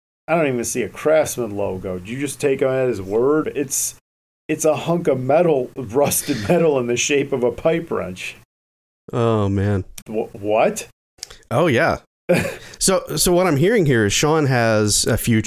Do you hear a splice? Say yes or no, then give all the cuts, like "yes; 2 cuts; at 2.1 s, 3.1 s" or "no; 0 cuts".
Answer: yes; 2 cuts; at 3.4 s, 10.0 s